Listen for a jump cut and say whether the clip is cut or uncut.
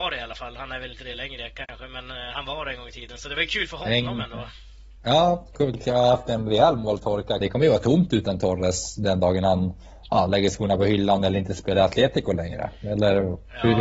cut